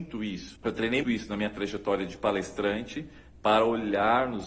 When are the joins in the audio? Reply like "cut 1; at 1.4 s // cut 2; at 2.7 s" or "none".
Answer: cut 1; at 1.0 s